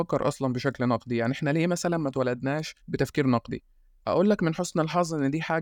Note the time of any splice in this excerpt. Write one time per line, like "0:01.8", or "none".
0:02.8